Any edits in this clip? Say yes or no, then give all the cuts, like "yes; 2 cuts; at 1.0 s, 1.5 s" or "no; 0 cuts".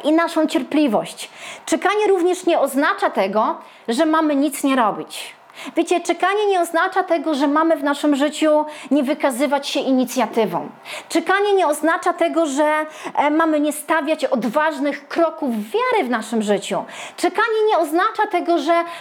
no; 0 cuts